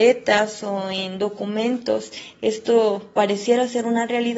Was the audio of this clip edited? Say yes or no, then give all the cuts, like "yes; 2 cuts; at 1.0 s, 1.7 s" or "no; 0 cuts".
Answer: no; 0 cuts